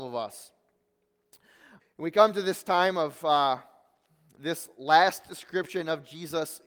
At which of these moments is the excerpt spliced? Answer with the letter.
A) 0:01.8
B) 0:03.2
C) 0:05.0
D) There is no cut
A